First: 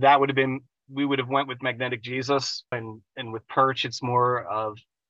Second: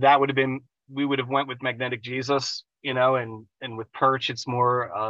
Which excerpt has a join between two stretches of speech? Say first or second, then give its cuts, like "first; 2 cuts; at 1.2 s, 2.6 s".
first; 1 cut; at 2.7 s